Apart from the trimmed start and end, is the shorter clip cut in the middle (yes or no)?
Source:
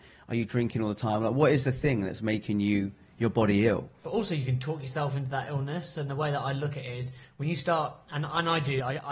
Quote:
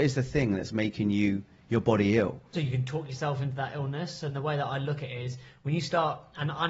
yes